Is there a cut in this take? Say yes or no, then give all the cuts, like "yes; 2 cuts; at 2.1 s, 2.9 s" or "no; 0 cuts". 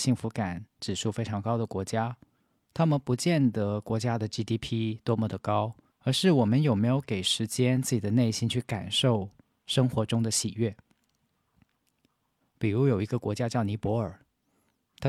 yes; 2 cuts; at 5.9 s, 12.4 s